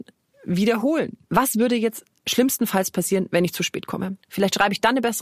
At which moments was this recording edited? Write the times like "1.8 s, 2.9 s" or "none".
1.3 s, 4.2 s